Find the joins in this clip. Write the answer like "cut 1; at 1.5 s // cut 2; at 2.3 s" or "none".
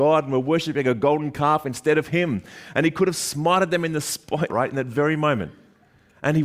cut 1; at 4.5 s